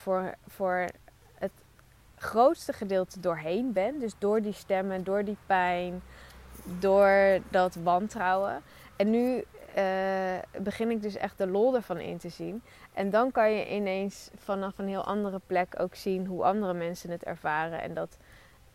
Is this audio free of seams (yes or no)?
yes